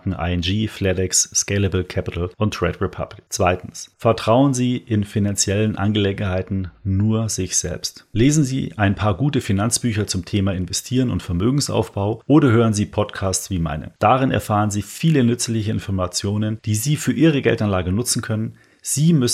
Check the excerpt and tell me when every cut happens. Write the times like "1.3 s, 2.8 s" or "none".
none